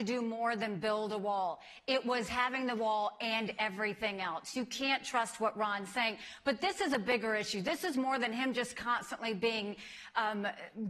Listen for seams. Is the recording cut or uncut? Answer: uncut